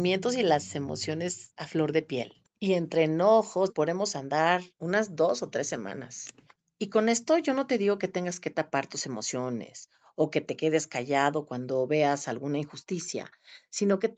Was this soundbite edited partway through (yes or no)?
yes